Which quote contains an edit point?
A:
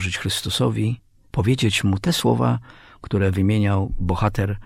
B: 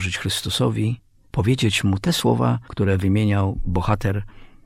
B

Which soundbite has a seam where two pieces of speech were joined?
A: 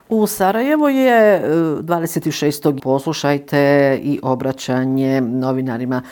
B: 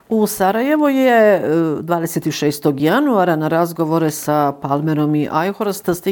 A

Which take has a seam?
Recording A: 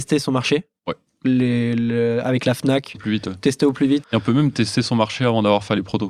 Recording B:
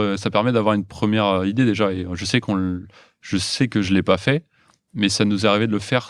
A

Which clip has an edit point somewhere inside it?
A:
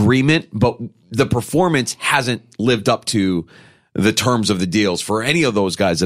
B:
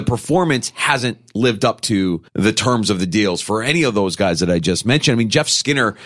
B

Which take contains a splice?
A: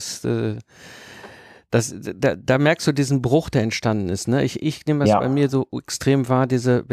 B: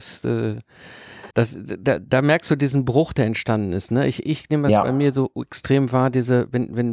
B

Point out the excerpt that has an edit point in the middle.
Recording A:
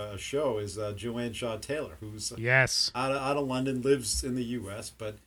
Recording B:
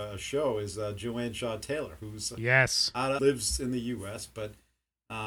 B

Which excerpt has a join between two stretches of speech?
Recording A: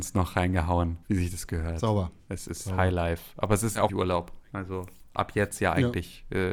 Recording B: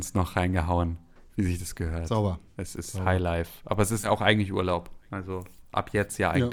A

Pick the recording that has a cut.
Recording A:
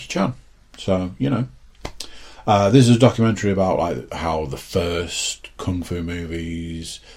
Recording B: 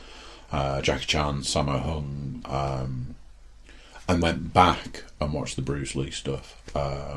B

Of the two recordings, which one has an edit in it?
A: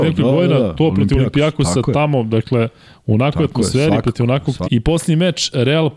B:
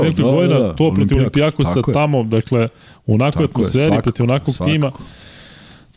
A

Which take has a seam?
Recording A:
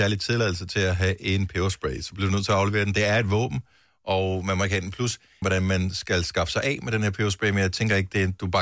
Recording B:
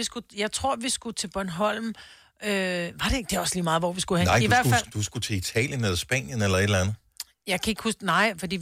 A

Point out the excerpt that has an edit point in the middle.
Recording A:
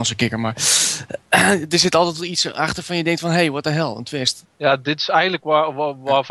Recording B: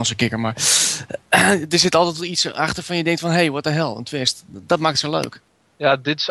A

